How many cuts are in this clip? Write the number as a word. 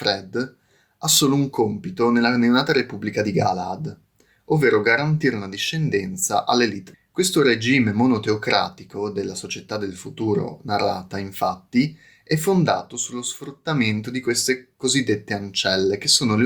zero